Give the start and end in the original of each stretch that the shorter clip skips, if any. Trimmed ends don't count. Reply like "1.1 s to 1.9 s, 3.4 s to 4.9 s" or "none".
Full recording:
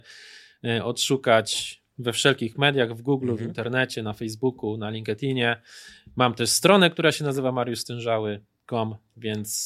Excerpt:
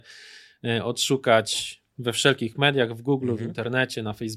none

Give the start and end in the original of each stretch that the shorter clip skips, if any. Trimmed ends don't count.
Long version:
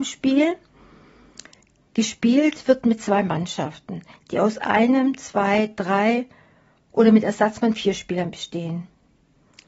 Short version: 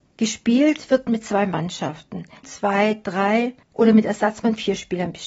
4.2 s to 5.2 s, 6.4 s to 6.8 s

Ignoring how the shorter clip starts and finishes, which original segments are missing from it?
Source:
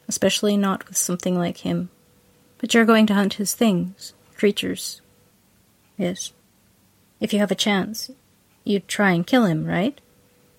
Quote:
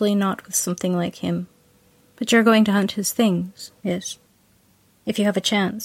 4.2 s to 5.9 s

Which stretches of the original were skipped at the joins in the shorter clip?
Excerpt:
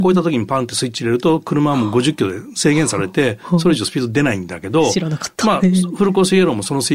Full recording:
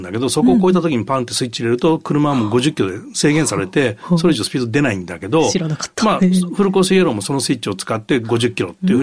none

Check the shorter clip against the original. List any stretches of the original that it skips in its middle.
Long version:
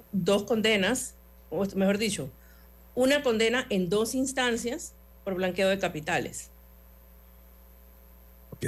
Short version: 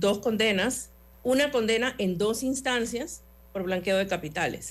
1.4 s to 2.9 s

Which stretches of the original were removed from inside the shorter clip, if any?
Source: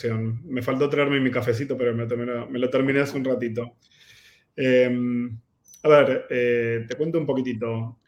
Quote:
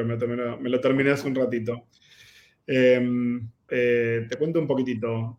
5.6 s to 6.3 s

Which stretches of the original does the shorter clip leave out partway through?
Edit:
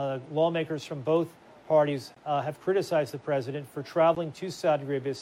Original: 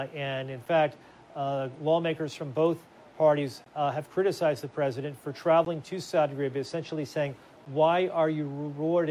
none

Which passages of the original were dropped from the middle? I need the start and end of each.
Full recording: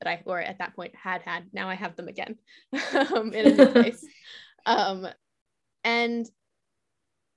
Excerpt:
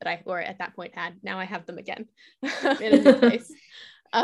0.9 s to 1.2 s, 3.1 s to 3.3 s

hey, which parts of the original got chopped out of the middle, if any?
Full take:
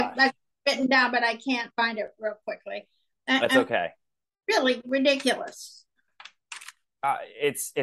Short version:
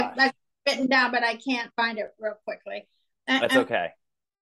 none

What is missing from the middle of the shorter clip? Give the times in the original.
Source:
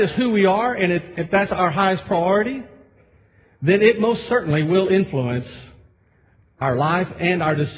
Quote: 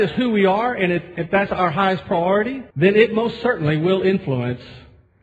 2.7 s to 3.6 s

